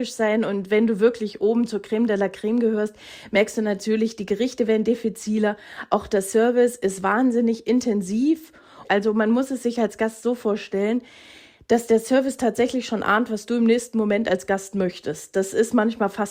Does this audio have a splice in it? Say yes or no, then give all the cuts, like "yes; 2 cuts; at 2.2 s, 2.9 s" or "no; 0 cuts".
no; 0 cuts